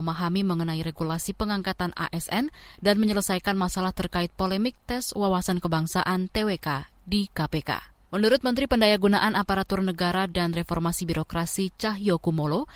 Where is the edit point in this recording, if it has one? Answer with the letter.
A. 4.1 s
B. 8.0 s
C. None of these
B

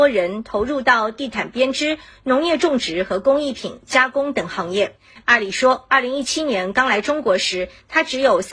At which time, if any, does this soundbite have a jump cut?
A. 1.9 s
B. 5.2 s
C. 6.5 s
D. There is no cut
B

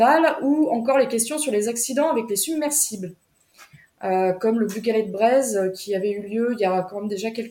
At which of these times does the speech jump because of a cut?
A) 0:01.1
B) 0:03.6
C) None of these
C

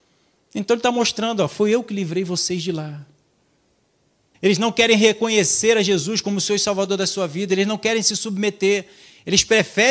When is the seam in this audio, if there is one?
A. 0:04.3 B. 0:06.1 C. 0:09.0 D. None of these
A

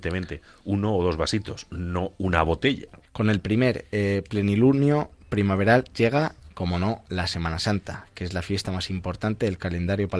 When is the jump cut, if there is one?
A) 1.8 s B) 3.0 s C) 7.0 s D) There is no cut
B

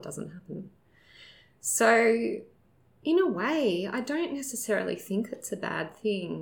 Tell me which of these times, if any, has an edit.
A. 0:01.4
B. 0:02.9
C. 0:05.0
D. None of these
D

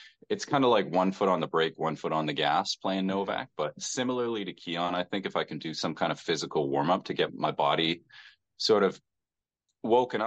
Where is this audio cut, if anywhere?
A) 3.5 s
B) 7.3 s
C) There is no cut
B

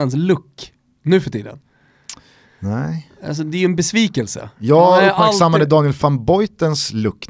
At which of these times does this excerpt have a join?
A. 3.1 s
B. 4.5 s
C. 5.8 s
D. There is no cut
D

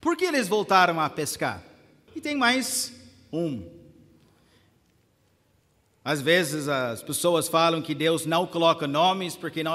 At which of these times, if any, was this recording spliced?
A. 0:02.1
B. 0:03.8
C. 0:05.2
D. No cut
A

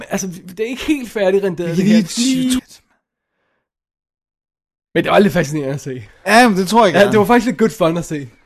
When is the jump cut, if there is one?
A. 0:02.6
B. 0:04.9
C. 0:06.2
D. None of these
A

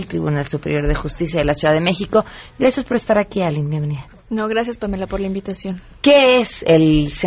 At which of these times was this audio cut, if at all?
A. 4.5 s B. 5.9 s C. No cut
C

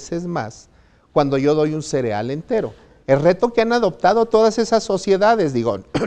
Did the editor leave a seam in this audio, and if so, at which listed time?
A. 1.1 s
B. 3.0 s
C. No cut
B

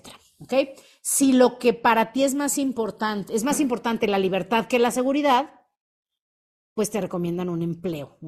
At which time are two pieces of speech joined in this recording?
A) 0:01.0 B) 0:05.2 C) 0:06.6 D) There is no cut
D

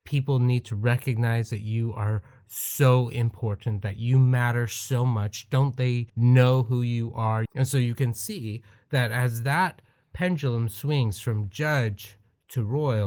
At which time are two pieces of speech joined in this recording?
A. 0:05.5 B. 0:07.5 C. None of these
B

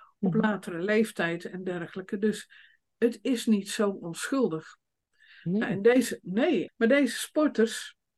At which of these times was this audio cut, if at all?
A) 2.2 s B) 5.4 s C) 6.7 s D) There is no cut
C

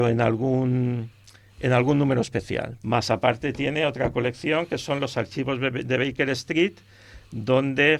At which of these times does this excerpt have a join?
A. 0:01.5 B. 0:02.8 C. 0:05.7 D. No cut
B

